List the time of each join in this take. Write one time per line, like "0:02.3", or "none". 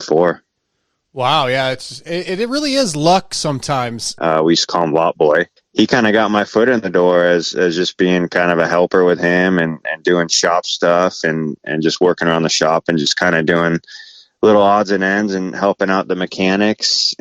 0:04.2
0:05.6